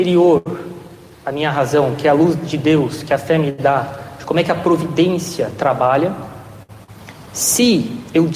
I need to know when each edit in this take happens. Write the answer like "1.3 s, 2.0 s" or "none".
none